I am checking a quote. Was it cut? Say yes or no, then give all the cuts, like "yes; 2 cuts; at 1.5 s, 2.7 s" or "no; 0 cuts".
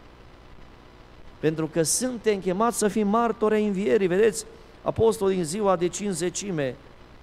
no; 0 cuts